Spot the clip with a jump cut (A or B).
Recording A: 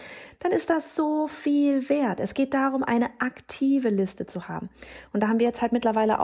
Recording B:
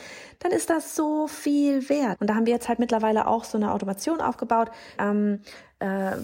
B